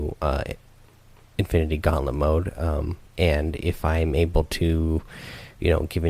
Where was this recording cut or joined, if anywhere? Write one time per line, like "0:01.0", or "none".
0:03.1

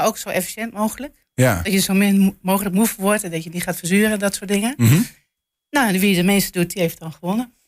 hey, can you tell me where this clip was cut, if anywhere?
none

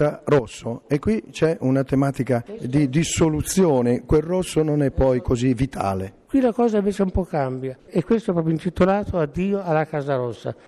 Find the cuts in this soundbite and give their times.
0:07.8

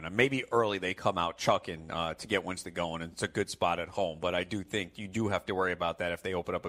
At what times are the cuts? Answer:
none

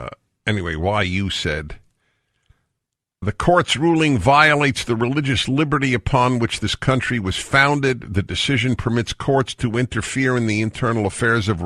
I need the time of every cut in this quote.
0:03.2

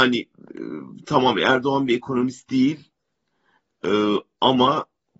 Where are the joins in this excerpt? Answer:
none

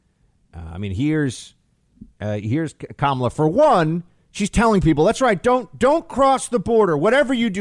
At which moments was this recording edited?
none

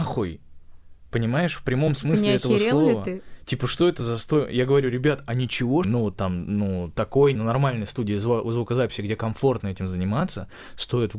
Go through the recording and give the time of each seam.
0:05.8
0:07.4

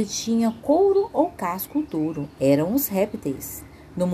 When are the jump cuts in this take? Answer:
0:02.3

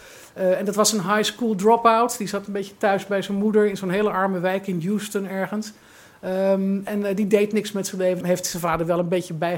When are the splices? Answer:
0:08.2

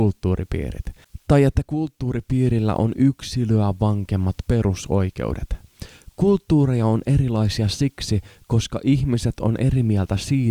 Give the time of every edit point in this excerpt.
none

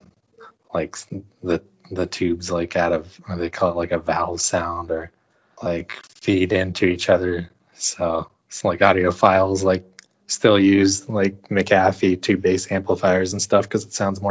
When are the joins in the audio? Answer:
none

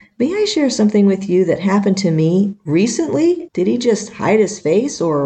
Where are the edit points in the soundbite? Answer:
0:03.5

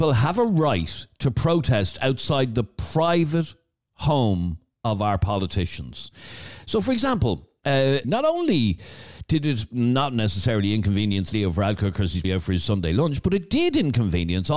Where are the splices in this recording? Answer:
0:08.0
0:12.2

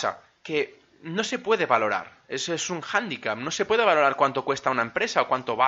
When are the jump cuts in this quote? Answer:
none

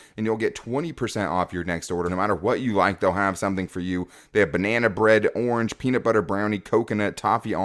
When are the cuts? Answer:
0:02.1

